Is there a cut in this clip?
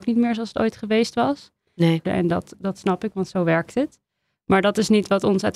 yes; 1 cut; at 2.0 s

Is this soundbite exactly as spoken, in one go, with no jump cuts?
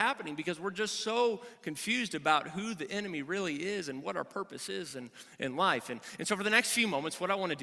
yes; 0 cuts

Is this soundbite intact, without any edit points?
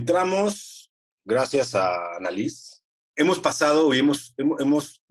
no; 1 cut; at 3.0 s

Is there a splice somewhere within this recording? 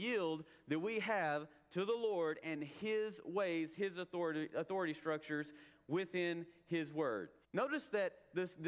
yes; 1 cut; at 7.4 s

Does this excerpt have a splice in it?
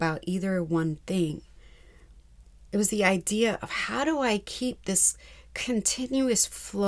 no; 0 cuts

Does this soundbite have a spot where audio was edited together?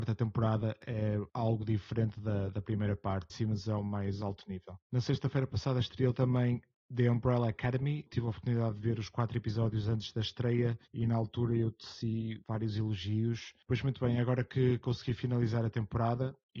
yes; 2 cuts; at 3.3 s, 10.9 s

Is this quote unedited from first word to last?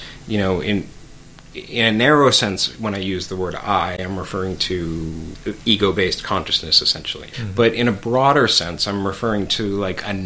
yes; 0 cuts

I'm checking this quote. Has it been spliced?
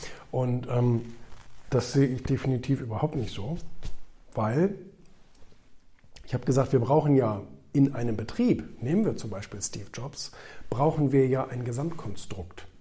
no; 0 cuts

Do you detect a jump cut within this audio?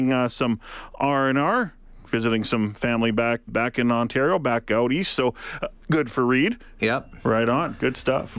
yes; 2 cuts; at 3.5 s, 6.8 s

